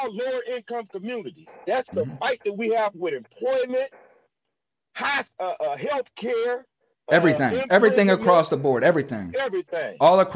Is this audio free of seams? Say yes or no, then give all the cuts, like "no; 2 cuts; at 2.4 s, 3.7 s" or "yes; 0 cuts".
yes; 0 cuts